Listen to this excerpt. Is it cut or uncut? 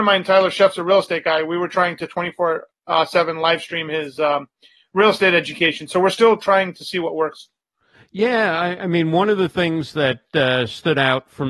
uncut